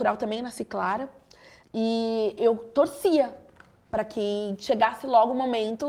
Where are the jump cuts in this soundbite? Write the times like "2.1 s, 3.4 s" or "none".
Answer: 1.6 s